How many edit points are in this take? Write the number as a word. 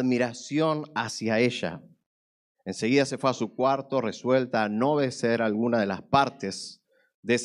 one